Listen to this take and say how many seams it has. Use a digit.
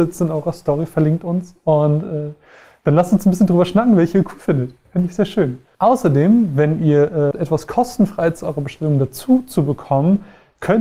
1